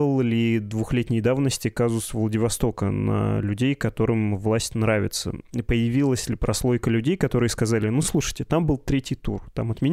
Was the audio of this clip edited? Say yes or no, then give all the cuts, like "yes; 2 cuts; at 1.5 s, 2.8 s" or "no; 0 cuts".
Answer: no; 0 cuts